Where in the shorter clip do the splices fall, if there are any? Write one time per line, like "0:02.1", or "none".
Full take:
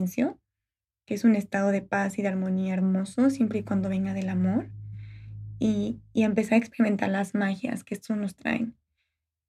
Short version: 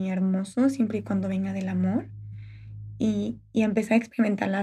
none